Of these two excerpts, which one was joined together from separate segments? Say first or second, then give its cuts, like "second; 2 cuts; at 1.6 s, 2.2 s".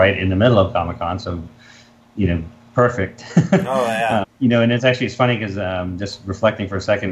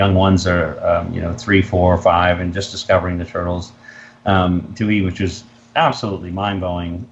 first; 1 cut; at 4.2 s